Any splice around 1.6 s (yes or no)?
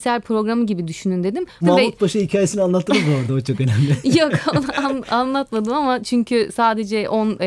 yes